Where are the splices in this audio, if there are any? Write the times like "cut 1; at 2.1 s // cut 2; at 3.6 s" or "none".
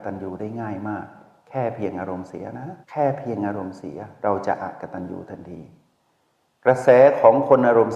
cut 1; at 2.8 s